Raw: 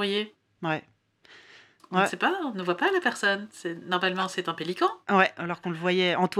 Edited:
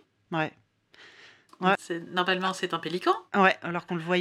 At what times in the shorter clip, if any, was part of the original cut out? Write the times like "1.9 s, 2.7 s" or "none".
1.7 s